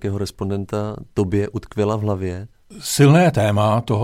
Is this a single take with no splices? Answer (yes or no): yes